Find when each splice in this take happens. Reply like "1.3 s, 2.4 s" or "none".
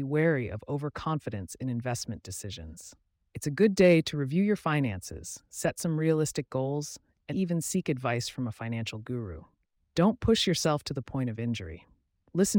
7.3 s, 9.8 s